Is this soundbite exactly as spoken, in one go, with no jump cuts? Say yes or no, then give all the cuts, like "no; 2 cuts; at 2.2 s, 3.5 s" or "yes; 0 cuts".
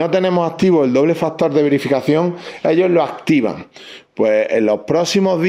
no; 1 cut; at 4.1 s